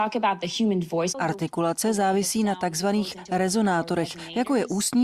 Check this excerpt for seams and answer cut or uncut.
cut